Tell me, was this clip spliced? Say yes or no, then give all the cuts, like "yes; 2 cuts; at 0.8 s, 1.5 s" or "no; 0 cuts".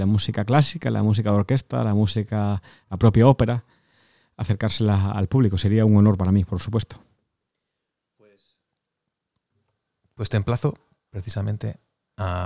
no; 0 cuts